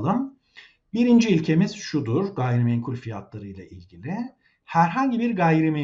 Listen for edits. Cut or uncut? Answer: uncut